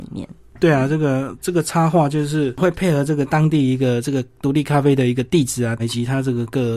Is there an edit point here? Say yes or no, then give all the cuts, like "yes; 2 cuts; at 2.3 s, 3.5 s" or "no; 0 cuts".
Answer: yes; 1 cut; at 5.8 s